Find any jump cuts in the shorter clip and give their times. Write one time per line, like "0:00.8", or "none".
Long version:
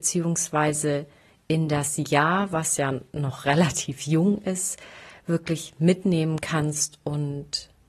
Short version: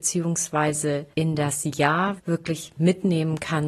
0:01.1
0:02.2

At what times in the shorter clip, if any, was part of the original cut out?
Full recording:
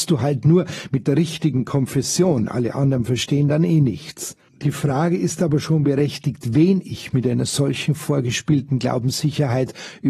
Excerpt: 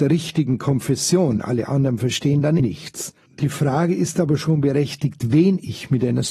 0:02.6

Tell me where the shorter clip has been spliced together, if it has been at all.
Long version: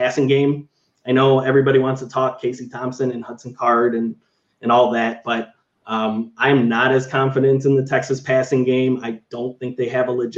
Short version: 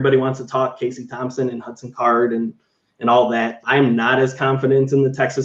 0:03.6

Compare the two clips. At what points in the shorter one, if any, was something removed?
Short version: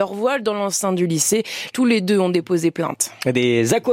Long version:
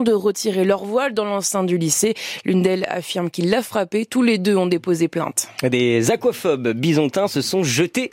0:01.7

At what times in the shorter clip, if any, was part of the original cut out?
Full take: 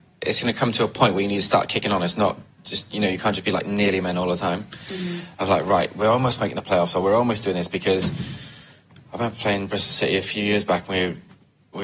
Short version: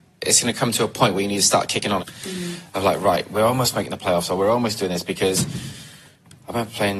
0:02.0

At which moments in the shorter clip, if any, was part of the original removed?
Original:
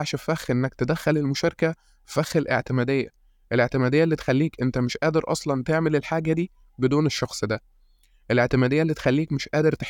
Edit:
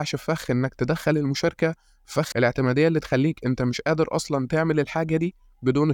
0:02.3

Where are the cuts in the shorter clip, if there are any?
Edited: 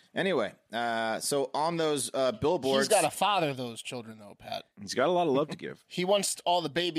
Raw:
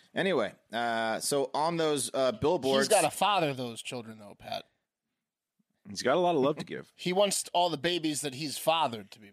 0:04.7

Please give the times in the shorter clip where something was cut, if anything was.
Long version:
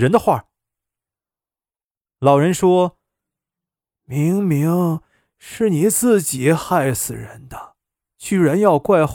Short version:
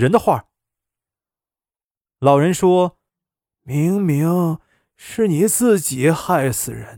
0:03.1

